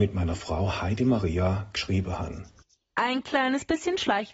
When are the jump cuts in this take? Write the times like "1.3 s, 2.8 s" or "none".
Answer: none